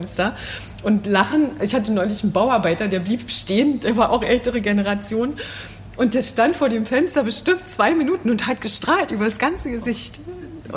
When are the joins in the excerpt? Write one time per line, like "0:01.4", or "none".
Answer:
none